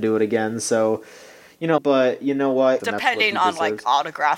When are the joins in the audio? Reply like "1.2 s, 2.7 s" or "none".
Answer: 1.8 s, 2.8 s